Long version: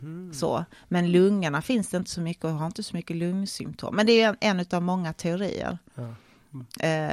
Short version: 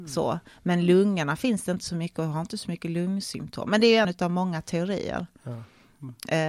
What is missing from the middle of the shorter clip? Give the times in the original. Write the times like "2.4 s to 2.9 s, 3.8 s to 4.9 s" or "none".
4.3 s to 4.6 s

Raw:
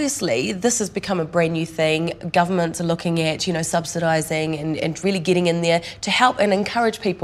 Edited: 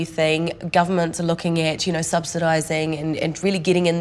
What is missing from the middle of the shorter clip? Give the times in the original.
none

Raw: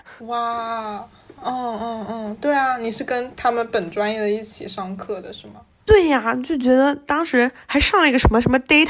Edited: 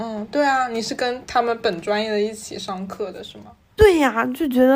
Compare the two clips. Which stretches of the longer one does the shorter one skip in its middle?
none

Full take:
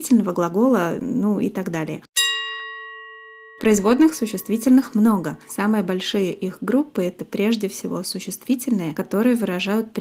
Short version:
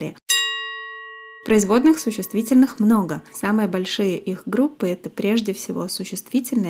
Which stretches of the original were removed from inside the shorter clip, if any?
3.2 s to 3.5 s

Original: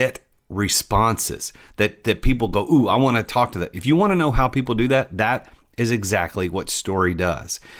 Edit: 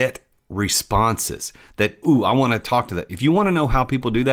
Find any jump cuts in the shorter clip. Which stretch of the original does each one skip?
2.0 s to 2.7 s

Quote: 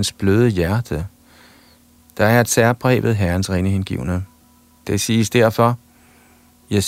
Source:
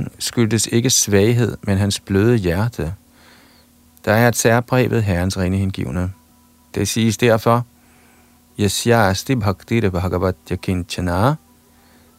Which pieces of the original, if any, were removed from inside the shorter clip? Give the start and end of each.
none

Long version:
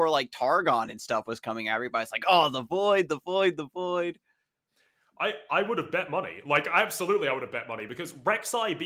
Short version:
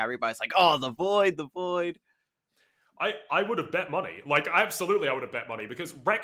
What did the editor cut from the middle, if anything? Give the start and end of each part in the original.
3.1 s to 3.6 s

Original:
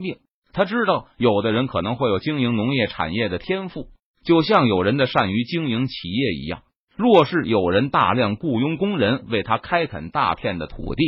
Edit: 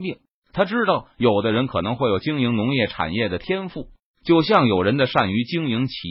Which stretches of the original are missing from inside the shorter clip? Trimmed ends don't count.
none

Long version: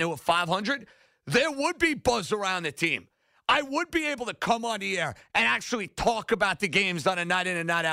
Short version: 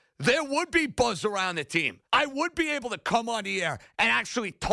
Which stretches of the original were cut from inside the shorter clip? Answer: 3.1 s to 3.4 s

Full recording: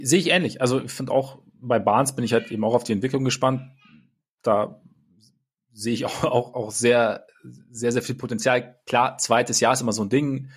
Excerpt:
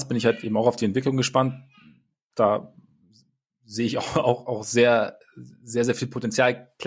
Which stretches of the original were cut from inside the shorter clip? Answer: none

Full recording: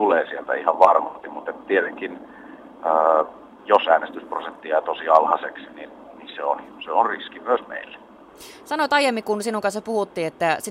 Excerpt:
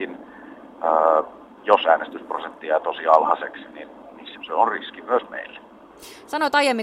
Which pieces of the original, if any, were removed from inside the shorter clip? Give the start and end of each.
6.4 s to 6.7 s

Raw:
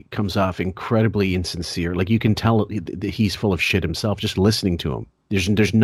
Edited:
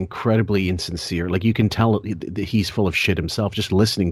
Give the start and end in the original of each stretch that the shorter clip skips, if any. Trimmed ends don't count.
none

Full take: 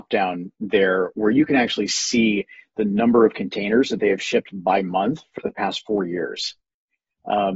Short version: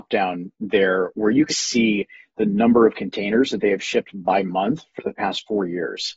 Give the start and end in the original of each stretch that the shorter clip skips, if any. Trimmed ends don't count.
1.5 s to 1.9 s

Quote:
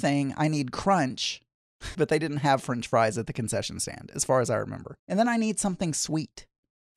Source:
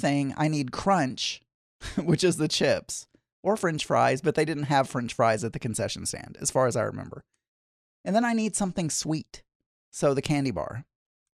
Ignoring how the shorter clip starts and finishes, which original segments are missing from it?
1.9 s to 4.2 s, 7.3 s to 8.0 s

